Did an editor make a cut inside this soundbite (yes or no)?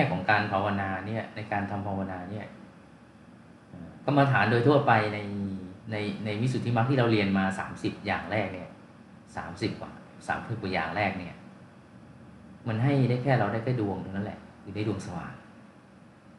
yes